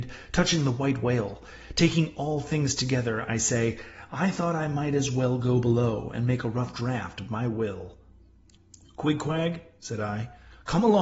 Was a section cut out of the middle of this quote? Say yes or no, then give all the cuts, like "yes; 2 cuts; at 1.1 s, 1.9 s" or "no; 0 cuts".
no; 0 cuts